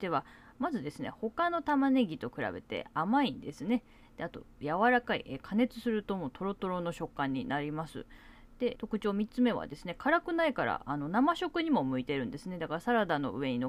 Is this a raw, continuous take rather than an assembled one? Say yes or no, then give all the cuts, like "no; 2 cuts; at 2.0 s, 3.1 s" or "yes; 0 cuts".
no; 1 cut; at 8.7 s